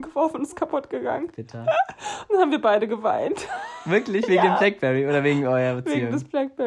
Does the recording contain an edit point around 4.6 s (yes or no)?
no